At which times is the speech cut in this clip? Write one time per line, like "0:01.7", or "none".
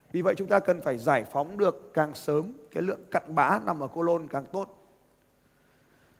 none